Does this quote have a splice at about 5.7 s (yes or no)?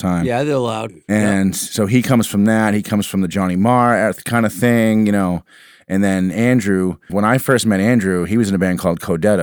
no